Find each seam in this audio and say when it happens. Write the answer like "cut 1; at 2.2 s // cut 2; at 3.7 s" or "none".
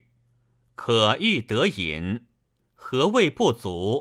cut 1; at 2.6 s